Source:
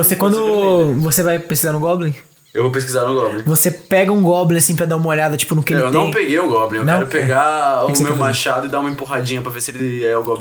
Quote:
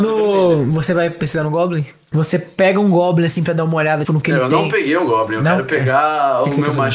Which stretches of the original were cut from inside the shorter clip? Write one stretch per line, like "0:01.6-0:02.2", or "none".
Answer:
0:02.4-0:03.4
0:05.4-0:05.5